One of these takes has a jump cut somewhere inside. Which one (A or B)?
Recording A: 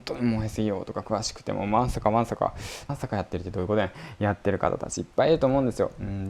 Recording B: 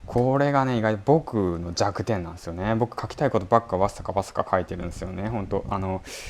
A